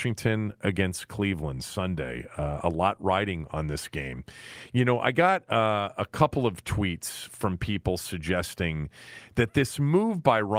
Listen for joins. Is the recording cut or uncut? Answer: uncut